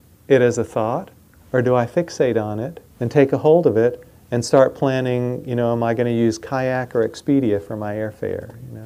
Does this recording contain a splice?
yes; 1 cut; at 2.9 s

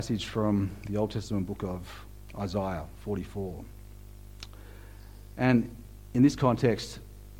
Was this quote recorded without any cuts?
yes; 0 cuts

